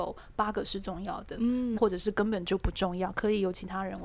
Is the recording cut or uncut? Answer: cut